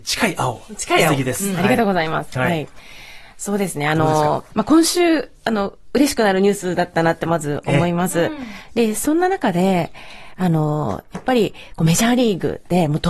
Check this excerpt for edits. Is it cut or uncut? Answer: cut